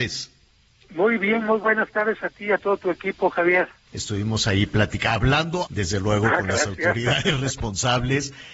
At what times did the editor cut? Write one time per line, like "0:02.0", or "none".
0:03.9
0:05.7